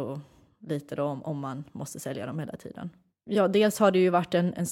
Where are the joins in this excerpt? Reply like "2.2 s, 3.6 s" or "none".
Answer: 3.1 s